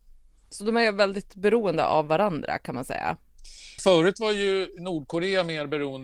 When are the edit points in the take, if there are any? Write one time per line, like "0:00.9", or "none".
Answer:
0:03.8